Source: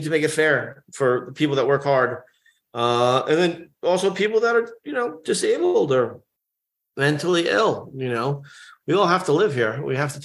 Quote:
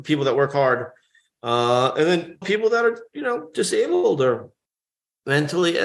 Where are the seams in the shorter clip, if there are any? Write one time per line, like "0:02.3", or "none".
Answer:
0:02.4